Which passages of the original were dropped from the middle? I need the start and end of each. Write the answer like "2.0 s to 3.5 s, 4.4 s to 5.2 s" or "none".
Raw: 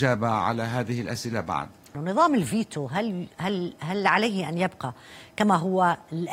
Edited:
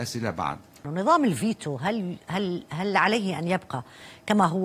none